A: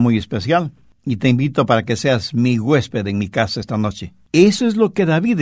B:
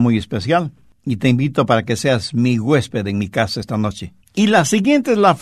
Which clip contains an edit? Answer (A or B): B